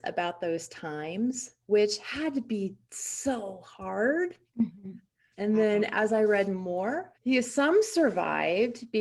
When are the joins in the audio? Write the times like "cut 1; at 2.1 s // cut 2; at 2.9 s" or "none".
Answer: cut 1; at 5.3 s // cut 2; at 7.1 s